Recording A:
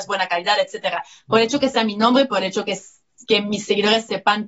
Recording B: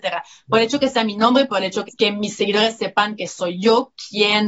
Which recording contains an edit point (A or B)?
B